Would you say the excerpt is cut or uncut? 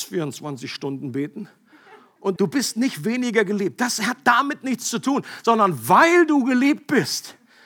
cut